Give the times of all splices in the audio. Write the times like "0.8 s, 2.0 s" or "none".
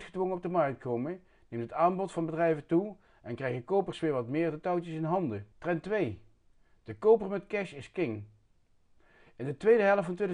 5.5 s